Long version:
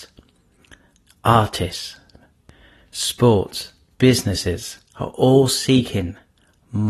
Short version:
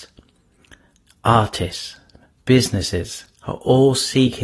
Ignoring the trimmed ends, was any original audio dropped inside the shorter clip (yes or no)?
yes